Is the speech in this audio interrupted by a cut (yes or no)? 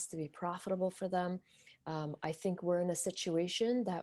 no